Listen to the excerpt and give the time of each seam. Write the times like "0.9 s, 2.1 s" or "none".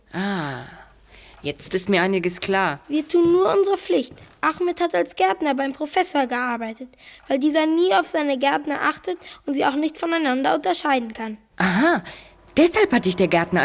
none